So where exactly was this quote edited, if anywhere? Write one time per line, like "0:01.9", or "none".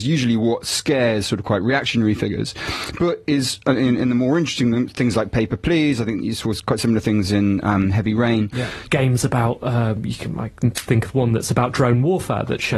0:08.9